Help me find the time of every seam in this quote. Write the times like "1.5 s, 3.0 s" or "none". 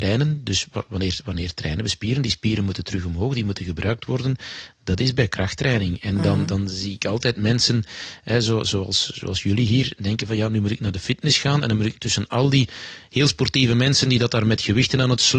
none